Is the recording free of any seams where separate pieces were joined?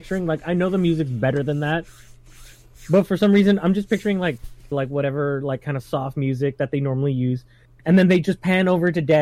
no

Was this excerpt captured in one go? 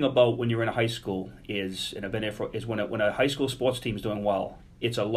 yes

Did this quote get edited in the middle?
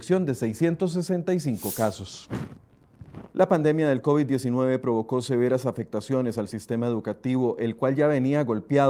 yes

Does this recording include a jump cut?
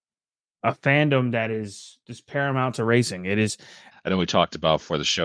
yes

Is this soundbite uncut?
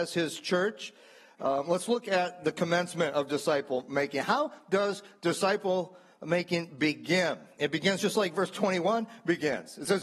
yes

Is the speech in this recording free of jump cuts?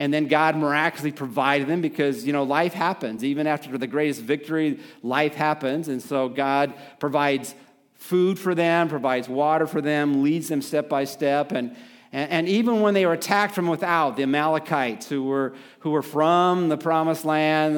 yes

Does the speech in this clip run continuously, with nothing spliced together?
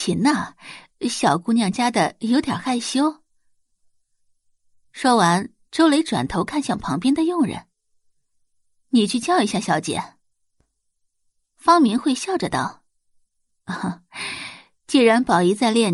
no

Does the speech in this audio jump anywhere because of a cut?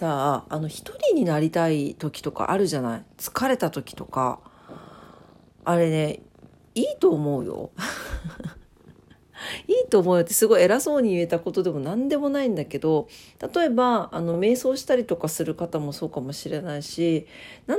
no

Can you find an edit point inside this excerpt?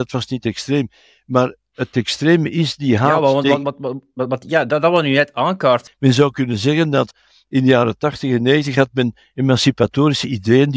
yes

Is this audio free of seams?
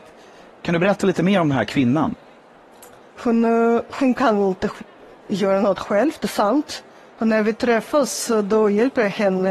no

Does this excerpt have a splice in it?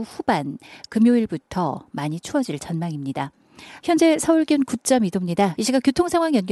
yes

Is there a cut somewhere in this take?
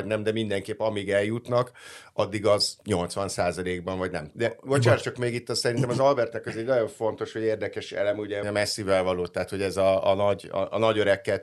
yes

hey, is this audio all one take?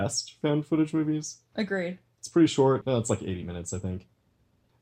yes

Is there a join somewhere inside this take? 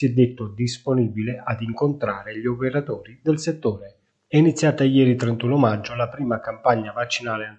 no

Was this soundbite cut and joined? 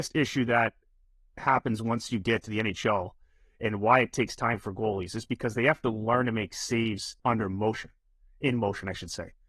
yes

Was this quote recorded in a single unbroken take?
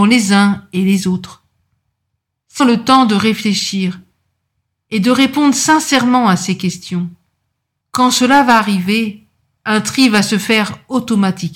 no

